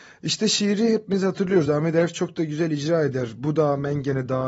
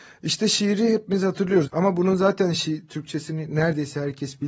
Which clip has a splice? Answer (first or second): second